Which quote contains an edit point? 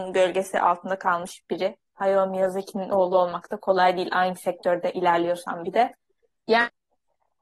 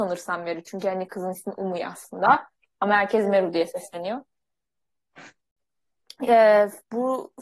first; 1 cut; at 6.4 s

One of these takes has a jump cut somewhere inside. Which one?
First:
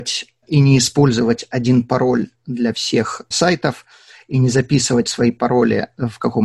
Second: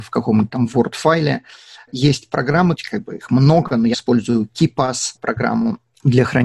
second; 2 cuts; at 2.7 s, 3.9 s

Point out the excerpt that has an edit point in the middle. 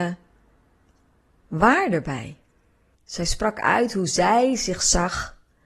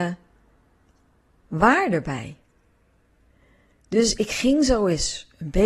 first; 1 cut; at 2.9 s

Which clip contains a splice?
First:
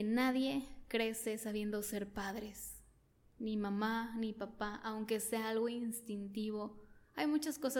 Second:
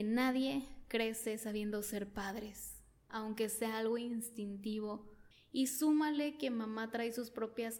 second; 2 cuts; at 3.1 s, 5.3 s

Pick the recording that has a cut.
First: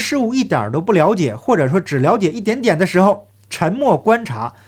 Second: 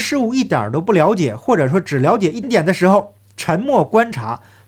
second; 1 cut; at 2.4 s

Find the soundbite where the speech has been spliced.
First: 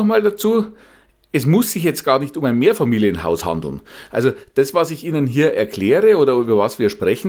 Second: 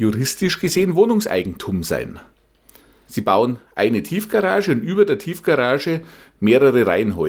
second; 1 cut; at 3.1 s

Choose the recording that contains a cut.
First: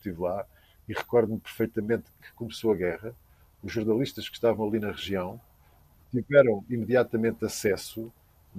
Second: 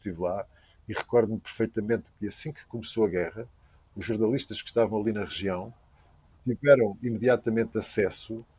first; 1 cut; at 2.2 s

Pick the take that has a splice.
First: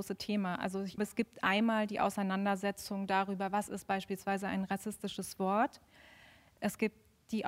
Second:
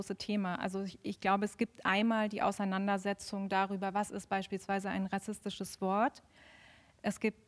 first; 1 cut; at 1.0 s

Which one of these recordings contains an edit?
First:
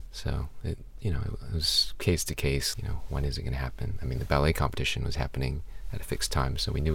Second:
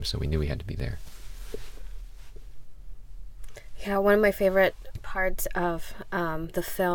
first; 1 cut; at 2.7 s

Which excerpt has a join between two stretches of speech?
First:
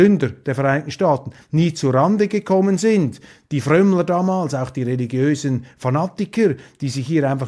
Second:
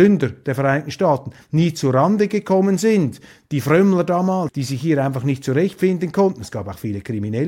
second; 1 cut; at 4.5 s

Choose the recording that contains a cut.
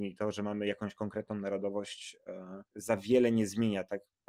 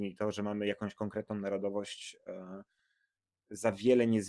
first; 1 cut; at 2.7 s

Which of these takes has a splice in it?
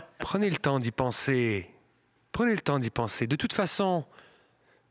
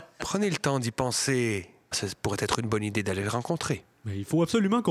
second; 1 cut; at 1.9 s

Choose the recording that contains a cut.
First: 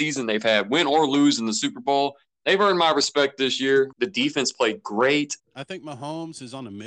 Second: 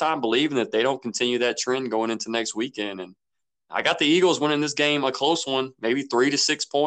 first; 2 cuts; at 3.9 s, 5.4 s

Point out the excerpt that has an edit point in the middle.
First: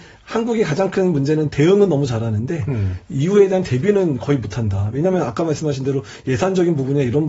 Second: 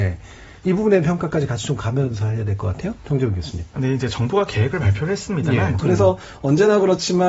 second; 1 cut; at 5.8 s

